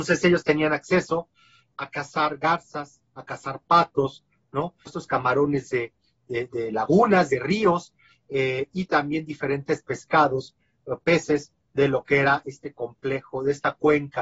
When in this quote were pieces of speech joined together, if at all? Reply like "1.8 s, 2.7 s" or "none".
1.7 s, 4.9 s